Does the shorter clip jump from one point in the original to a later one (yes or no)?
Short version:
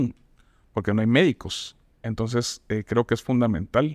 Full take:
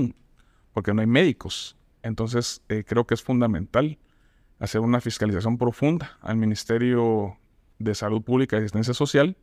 no